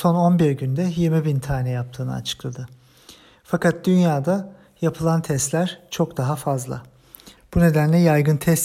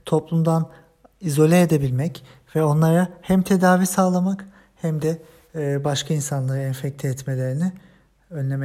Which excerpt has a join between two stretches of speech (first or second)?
first